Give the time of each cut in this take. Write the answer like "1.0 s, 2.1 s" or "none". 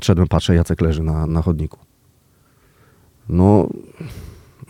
1.3 s